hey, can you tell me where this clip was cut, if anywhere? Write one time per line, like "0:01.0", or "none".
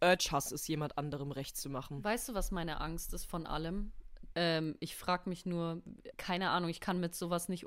0:04.3
0:06.1